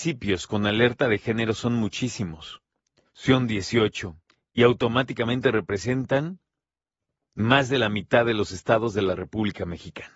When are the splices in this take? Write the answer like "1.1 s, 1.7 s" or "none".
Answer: 3.1 s